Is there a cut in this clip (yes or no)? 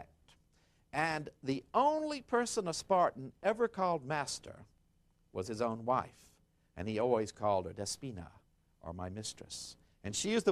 no